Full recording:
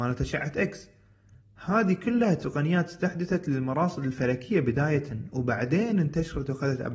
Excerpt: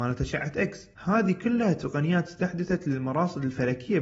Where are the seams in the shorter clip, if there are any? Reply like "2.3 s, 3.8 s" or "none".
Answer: 0.9 s